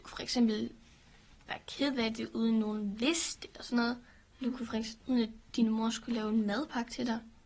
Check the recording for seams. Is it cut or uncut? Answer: cut